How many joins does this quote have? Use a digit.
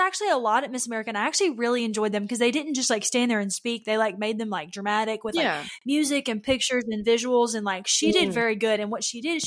0